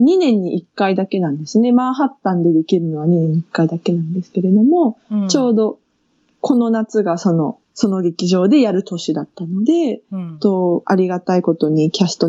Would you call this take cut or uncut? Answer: cut